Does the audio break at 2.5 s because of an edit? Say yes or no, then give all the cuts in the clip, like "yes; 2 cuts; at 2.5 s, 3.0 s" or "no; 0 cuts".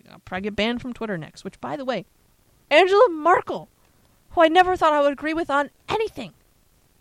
yes; 1 cut; at 2.5 s